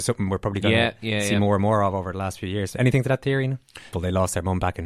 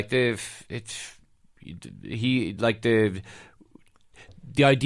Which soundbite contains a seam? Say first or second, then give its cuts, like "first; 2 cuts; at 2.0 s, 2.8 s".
first; 1 cut; at 3.9 s